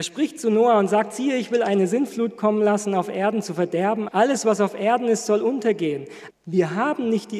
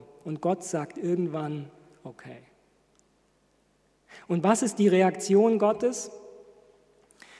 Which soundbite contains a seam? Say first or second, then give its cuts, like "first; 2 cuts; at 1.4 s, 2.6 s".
first; 2 cuts; at 4.1 s, 6.3 s